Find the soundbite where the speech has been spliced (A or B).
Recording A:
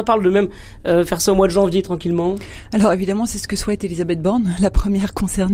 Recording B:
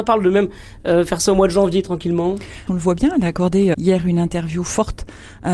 B